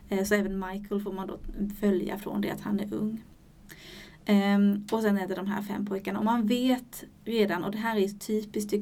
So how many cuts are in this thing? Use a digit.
0